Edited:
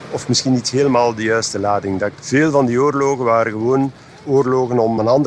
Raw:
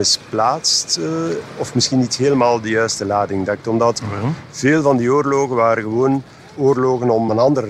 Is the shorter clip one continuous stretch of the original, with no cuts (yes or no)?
no